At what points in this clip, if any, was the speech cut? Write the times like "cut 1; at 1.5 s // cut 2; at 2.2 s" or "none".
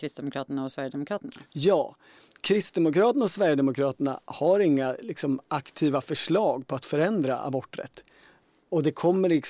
none